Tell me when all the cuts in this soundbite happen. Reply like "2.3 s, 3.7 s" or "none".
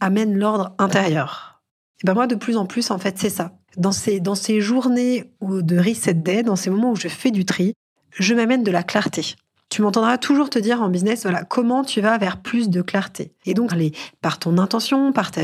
13.7 s